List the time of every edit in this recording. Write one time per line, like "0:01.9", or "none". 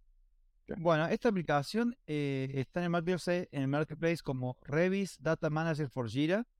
none